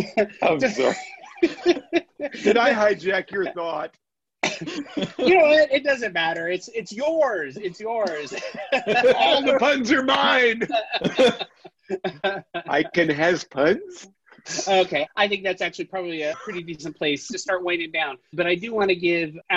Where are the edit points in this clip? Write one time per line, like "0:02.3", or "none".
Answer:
0:15.1
0:16.3